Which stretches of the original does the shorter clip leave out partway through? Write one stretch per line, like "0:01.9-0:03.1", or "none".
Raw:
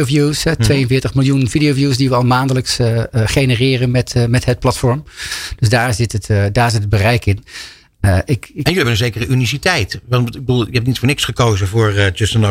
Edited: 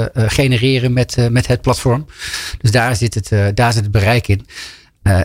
none